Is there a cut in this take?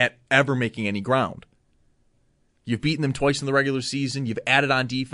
no; 0 cuts

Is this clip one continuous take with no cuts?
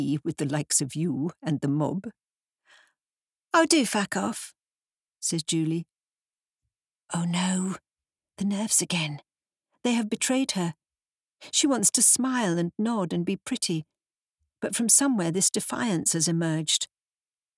yes; 0 cuts

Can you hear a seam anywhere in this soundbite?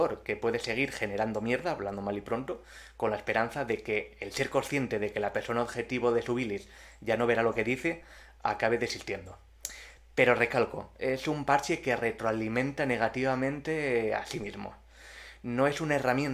no; 0 cuts

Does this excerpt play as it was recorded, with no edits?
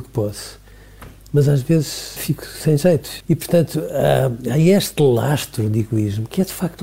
no; 2 cuts; at 2.2 s, 3.2 s

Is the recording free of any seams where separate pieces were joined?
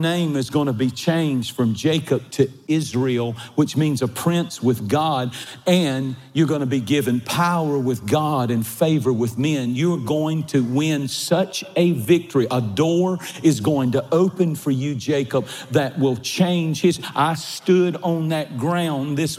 yes; 0 cuts

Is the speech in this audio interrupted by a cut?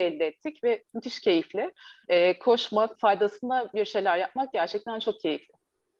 yes; 1 cut; at 2.9 s

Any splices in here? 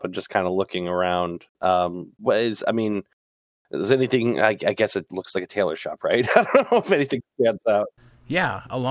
no; 0 cuts

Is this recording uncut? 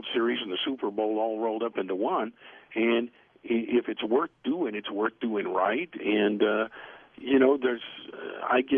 yes; 0 cuts

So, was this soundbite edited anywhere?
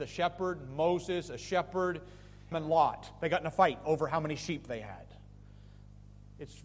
yes; 1 cut; at 2.5 s

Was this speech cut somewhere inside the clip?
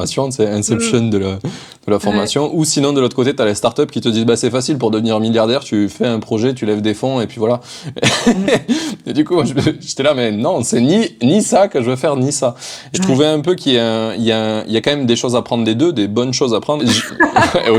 yes; 2 cuts; at 12.9 s, 16.8 s

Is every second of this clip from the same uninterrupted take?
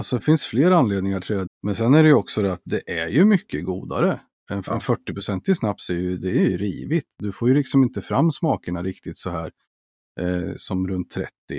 no; 1 cut; at 1.5 s

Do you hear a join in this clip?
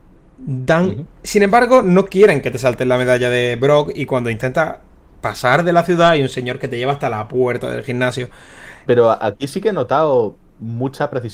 yes; 2 cuts; at 1.1 s, 8.9 s

